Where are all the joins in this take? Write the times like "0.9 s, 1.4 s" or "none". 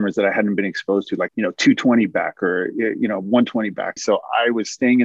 1.3 s, 4.0 s